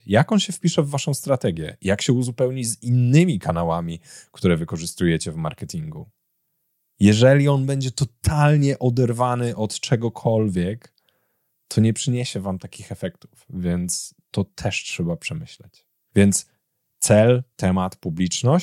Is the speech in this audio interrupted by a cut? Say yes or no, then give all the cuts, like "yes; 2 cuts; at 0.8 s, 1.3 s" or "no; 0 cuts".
no; 0 cuts